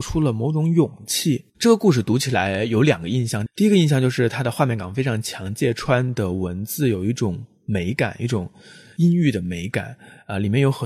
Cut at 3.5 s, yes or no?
no